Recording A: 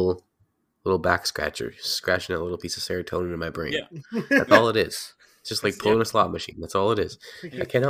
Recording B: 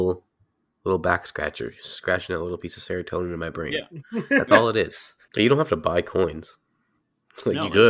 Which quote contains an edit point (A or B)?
B